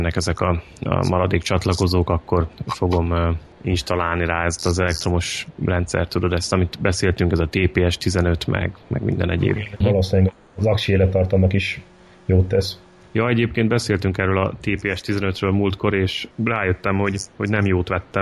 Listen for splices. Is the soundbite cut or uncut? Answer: cut